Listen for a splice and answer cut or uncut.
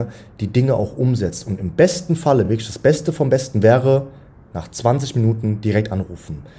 uncut